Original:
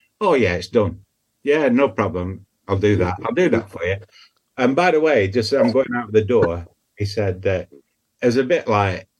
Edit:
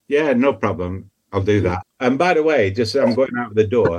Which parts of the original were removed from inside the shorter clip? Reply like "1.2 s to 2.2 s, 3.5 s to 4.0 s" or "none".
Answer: 3.2 s to 4.4 s

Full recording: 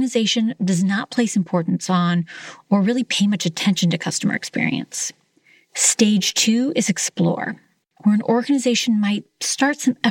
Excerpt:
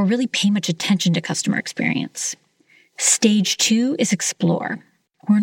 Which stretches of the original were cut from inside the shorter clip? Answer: none

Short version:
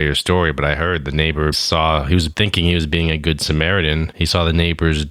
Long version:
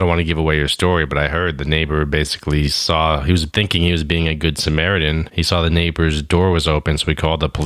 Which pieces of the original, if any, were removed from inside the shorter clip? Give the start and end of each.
2.1 s to 2.7 s

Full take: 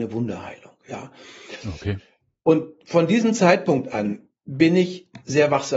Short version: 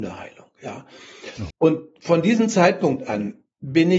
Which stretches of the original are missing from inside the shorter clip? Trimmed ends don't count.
1.8 s to 2.4 s

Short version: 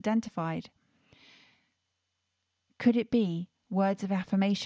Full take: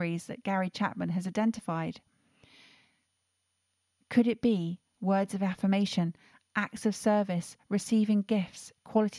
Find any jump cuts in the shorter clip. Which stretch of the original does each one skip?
none

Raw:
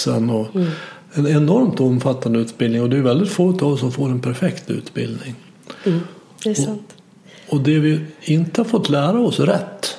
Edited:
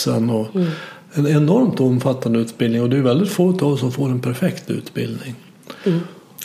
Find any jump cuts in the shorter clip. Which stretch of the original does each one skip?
none

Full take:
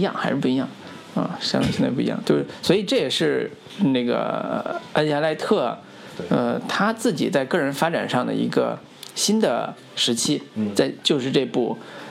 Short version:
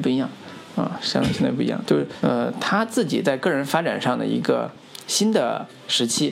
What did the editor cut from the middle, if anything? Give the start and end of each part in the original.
2.6 s to 6.3 s

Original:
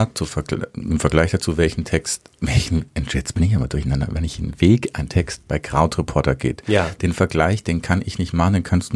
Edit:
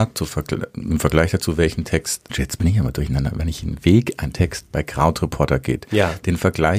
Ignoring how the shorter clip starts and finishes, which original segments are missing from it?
2.3 s to 3.1 s

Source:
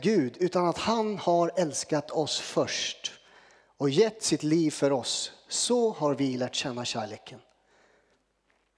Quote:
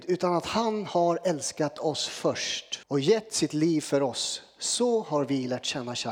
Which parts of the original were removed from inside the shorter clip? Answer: 3.1 s to 3.7 s

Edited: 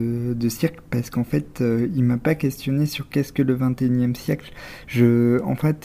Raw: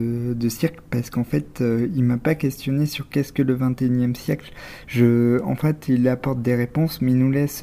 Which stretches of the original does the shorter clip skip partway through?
none

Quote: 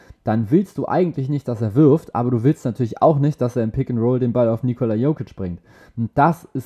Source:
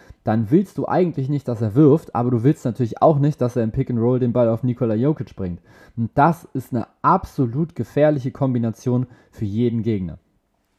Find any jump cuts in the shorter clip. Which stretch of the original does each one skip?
none

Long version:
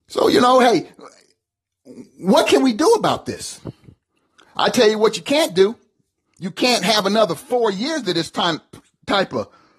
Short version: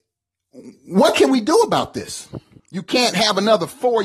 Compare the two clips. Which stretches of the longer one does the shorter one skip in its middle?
3.9 s to 6.3 s

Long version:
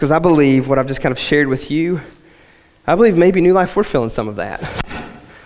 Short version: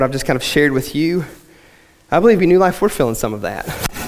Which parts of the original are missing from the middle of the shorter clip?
3.1 s to 3.3 s

